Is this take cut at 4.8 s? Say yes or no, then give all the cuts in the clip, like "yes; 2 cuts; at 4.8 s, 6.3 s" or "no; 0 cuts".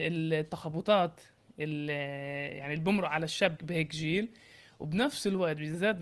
no; 1 cut; at 3.6 s